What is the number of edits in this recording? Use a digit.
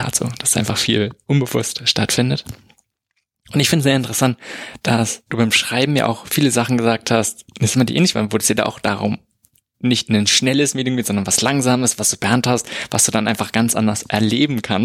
1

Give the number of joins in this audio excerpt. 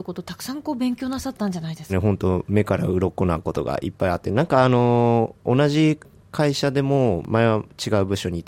1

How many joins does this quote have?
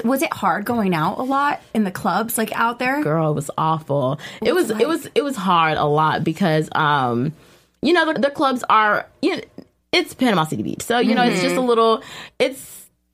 1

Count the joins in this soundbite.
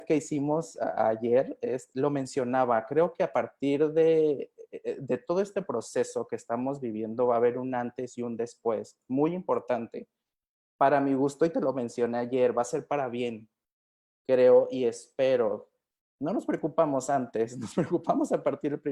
1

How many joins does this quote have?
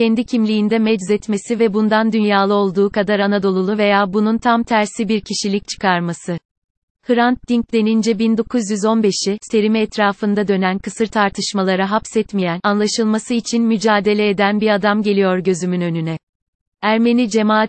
2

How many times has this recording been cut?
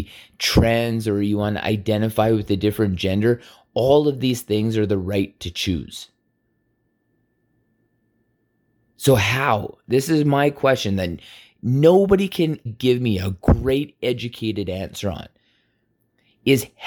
1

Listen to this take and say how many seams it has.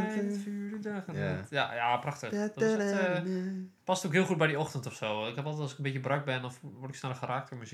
0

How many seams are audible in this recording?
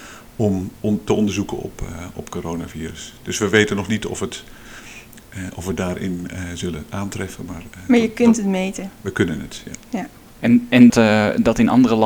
1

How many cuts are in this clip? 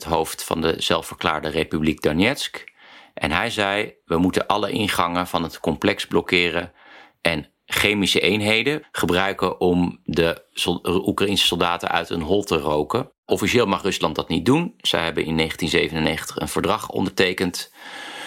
1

